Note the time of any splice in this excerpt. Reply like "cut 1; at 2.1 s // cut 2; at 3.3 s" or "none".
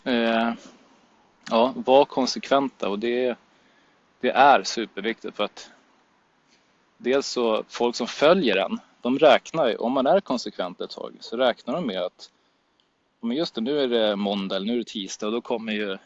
cut 1; at 1.3 s